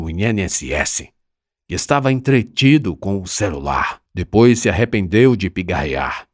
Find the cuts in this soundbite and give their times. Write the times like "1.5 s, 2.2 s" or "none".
4.1 s